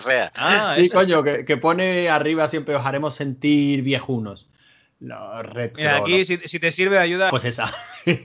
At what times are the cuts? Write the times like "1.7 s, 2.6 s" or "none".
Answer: 7.3 s